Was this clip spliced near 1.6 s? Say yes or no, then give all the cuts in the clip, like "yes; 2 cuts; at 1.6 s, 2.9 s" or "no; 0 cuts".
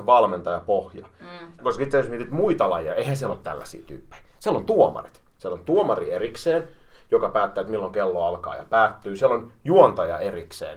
yes; 1 cut; at 1.6 s